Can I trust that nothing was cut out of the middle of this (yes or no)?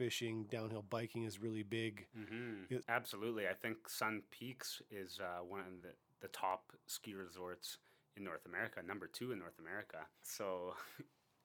no